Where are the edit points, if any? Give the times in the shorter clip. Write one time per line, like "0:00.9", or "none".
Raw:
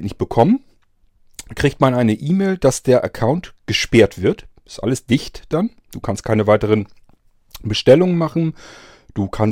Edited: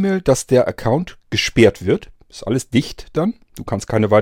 none